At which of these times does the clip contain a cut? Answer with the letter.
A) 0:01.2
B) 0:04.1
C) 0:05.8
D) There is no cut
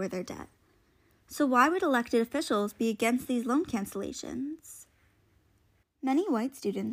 C